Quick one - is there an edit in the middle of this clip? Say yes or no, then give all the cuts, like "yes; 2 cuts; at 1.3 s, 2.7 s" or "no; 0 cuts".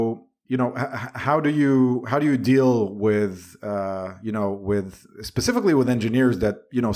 no; 0 cuts